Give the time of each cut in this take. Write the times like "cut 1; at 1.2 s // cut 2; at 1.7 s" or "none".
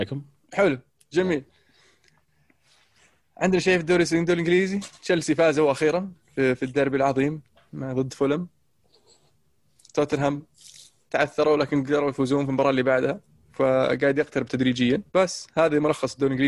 cut 1; at 15.1 s